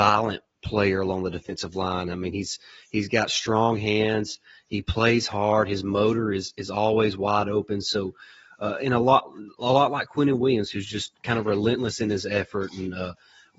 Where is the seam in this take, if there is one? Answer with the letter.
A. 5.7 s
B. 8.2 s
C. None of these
C